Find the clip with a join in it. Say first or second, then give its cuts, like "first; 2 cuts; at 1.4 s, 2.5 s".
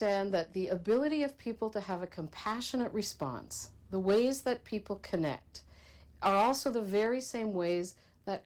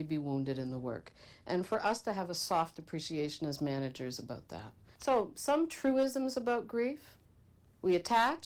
second; 1 cut; at 4.9 s